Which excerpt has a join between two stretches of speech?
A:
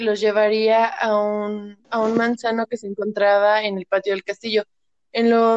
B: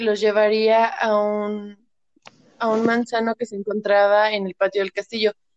A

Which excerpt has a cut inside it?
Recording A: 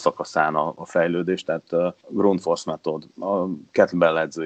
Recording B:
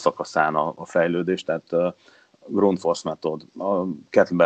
A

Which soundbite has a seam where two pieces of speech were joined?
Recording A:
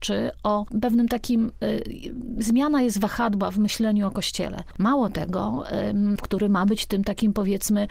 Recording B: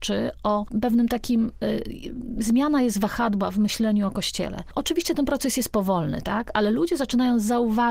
A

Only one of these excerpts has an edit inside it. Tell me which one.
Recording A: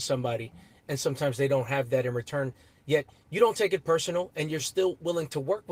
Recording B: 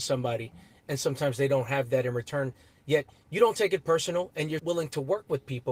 B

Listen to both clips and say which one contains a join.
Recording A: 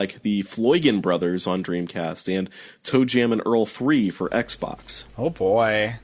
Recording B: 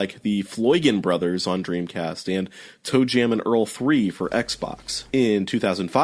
B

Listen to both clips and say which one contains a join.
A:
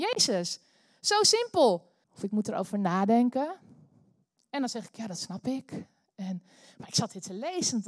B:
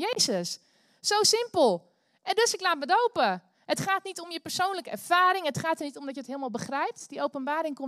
A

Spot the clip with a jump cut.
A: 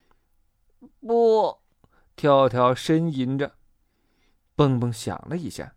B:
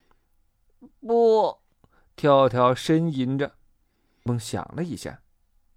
B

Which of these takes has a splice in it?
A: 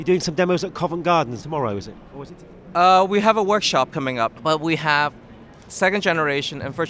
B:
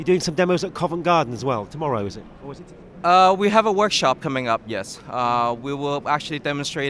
A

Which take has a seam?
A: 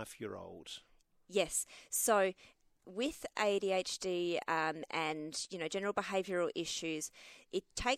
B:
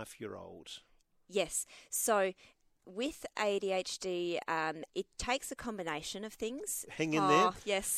B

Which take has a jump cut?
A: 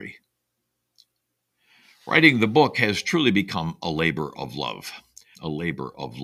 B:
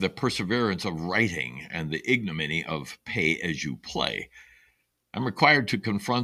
A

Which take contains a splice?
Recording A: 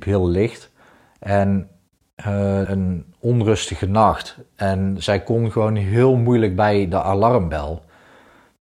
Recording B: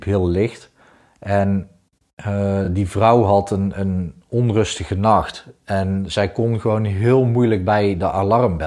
A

